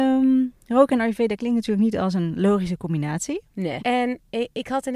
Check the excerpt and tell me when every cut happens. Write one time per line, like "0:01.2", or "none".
0:03.8